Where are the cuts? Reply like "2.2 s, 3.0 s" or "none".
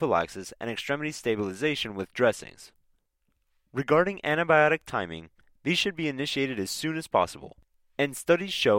none